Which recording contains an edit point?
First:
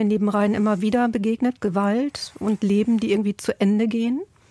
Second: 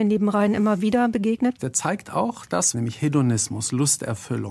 second; 2 cuts; at 1.6 s, 2.7 s

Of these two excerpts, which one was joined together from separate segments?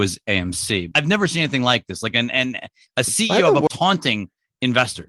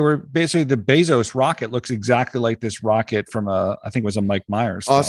first; 2 cuts; at 0.9 s, 3.7 s

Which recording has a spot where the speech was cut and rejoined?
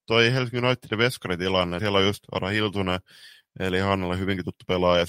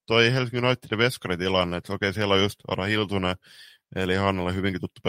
first; 1 cut; at 1.8 s

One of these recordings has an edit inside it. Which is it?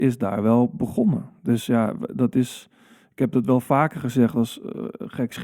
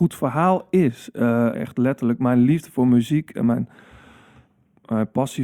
second; 1 cut; at 1.5 s

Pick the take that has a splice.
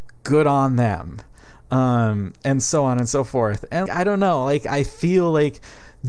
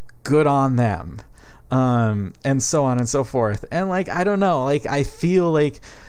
first; 1 cut; at 3.9 s

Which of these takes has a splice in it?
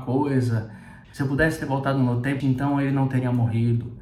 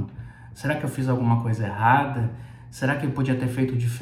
first; 2 cuts; at 1.0 s, 2.4 s

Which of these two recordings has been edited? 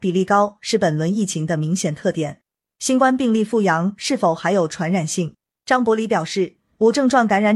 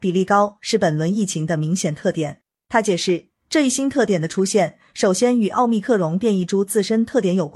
first; 2 cuts; at 2.7 s, 5.6 s

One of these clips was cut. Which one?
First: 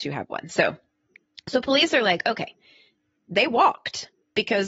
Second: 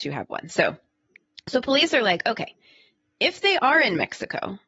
first; 1 cut; at 3.2 s

